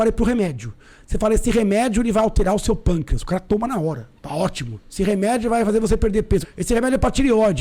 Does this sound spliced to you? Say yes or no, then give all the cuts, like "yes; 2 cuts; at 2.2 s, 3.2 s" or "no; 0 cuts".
yes; 2 cuts; at 4.2 s, 6.4 s